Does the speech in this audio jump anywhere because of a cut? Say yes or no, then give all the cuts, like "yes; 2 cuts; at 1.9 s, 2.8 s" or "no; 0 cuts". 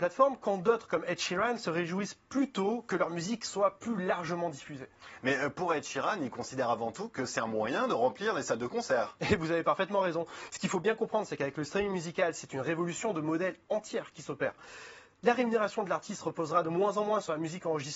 yes; 1 cut; at 13.6 s